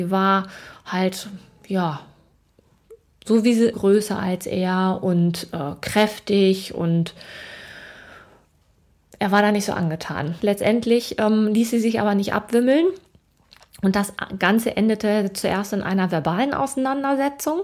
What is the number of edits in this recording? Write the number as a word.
two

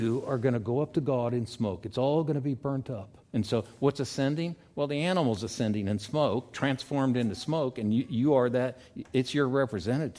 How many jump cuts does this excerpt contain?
one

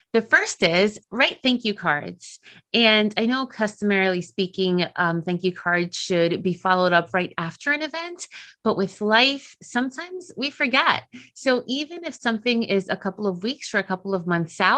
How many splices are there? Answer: zero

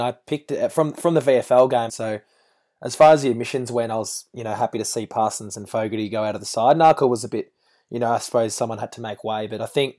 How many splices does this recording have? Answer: one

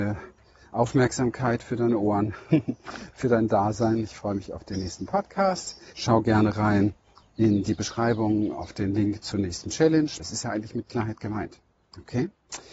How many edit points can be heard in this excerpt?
two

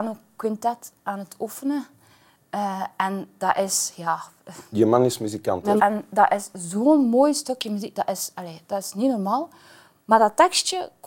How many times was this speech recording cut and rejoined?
one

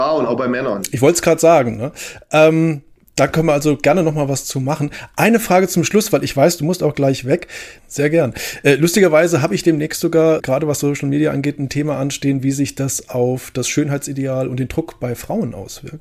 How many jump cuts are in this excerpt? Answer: two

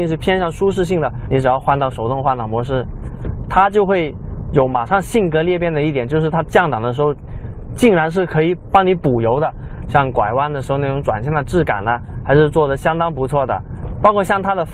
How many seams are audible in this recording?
two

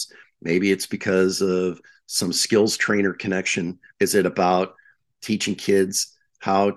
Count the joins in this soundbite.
one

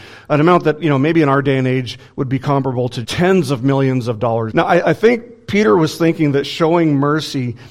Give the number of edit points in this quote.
two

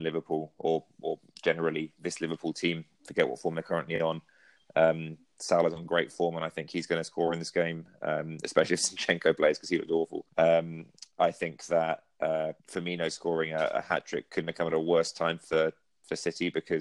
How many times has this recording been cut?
two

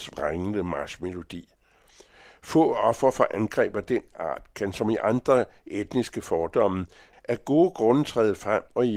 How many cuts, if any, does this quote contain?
one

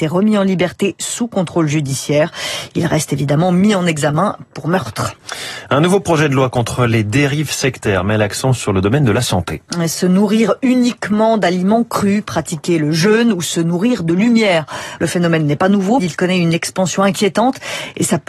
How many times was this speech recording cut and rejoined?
two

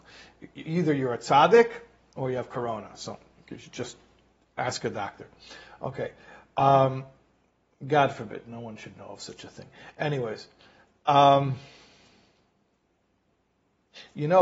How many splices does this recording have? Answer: zero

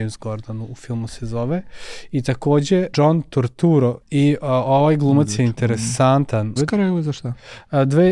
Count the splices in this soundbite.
three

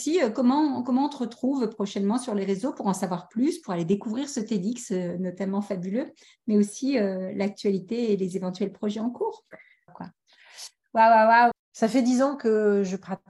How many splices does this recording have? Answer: two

